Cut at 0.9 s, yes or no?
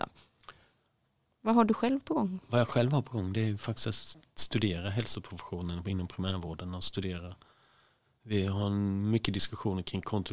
no